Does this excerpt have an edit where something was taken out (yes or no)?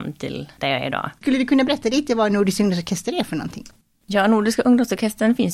yes